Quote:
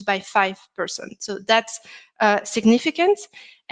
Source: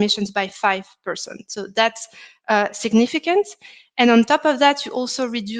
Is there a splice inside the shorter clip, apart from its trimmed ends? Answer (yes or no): no